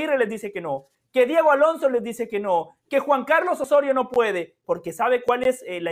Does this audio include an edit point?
yes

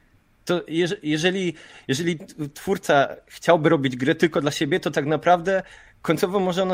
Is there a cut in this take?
no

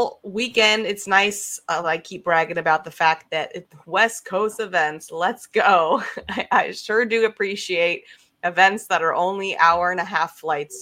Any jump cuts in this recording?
no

